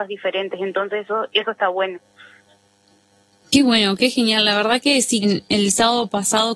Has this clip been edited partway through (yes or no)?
yes